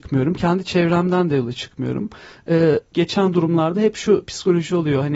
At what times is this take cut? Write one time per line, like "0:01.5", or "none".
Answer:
0:02.9

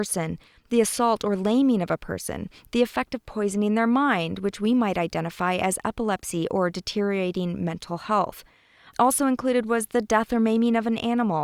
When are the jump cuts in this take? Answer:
none

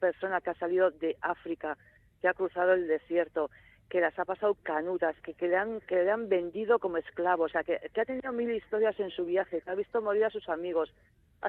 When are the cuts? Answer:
0:05.2
0:09.6

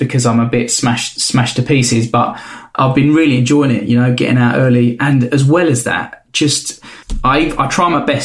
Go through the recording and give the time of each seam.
none

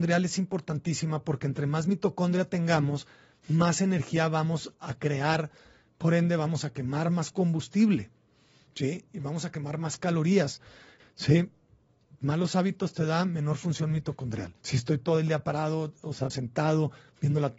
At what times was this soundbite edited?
0:11.0
0:14.6
0:16.3

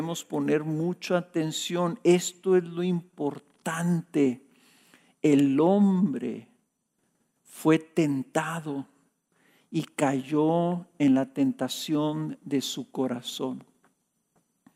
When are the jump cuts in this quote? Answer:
none

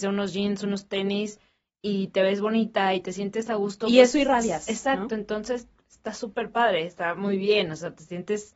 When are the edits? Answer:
none

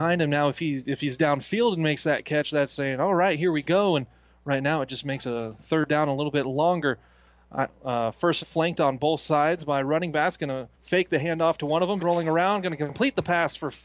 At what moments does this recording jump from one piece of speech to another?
0:08.4
0:10.7
0:12.0

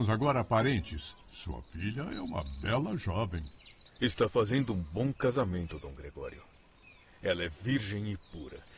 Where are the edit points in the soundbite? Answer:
0:01.2

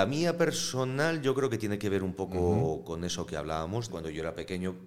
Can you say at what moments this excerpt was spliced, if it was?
0:03.9

